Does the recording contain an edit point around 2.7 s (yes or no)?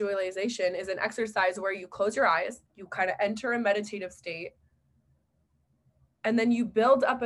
yes